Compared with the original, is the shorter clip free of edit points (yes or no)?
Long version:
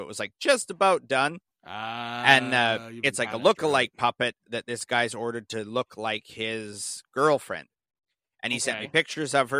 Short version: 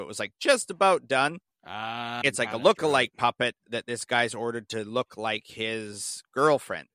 no